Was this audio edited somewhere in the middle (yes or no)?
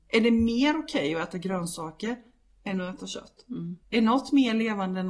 yes